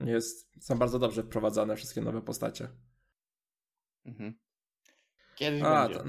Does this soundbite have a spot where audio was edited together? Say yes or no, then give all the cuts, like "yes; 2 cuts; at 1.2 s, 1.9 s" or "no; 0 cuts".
yes; 1 cut; at 5.2 s